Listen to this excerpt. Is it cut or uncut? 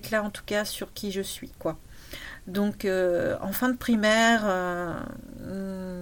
cut